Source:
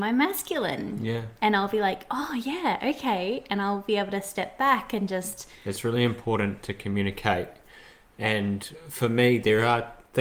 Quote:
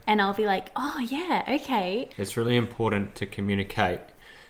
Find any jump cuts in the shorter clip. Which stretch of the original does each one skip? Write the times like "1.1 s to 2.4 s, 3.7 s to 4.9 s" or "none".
3.5 s to 5.6 s